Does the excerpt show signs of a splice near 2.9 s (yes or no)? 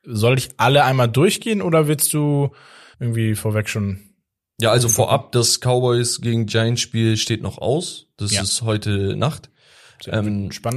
yes